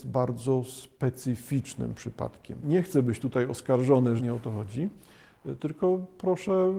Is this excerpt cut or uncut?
cut